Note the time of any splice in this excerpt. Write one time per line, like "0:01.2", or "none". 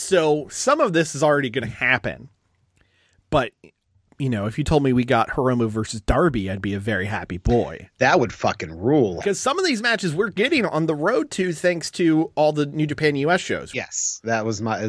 0:09.2
0:13.7